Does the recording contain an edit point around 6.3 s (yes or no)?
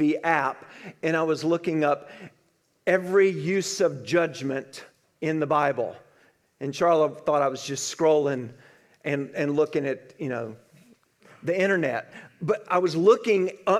no